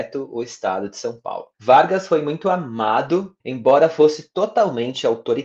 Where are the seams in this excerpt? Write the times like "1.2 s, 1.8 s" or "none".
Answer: 1.5 s, 3.4 s